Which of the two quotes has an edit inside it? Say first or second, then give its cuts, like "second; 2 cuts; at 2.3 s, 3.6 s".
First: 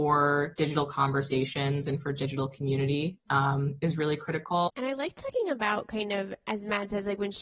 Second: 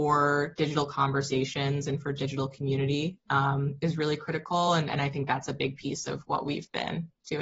first; 1 cut; at 4.7 s